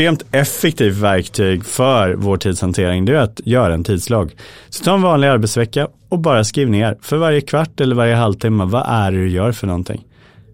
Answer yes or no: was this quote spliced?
no